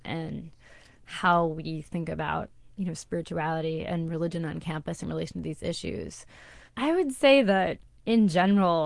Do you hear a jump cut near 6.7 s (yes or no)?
yes